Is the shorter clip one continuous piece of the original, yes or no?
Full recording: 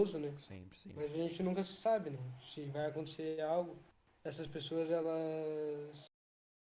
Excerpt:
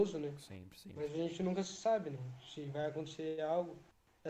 yes